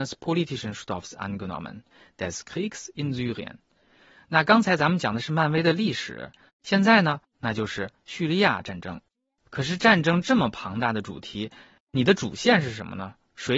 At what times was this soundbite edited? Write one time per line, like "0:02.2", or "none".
0:07.3